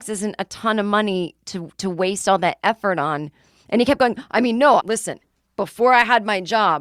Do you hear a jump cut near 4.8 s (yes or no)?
yes